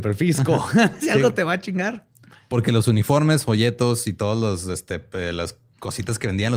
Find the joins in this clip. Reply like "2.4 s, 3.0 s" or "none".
none